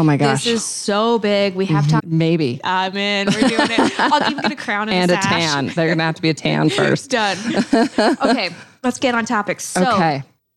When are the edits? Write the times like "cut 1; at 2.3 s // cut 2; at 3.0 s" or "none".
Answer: cut 1; at 2.0 s // cut 2; at 5.8 s